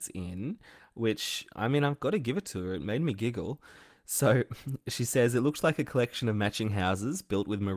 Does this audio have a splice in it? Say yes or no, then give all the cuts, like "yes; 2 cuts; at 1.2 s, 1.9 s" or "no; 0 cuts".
no; 0 cuts